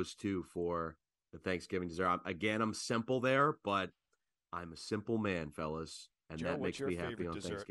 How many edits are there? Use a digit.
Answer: 0